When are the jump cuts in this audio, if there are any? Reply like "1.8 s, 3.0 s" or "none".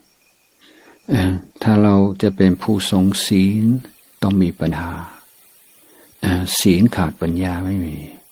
1.5 s, 4.7 s